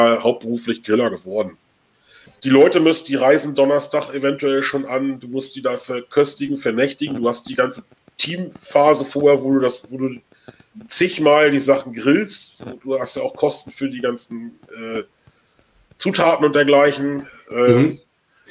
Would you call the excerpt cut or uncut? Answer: cut